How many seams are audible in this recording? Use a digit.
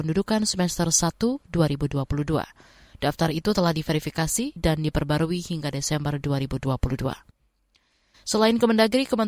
1